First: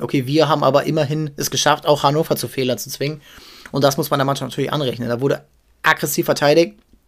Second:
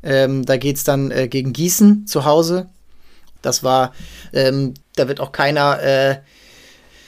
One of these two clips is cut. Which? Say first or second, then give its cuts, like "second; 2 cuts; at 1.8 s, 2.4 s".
second; 2 cuts; at 3.4 s, 4.8 s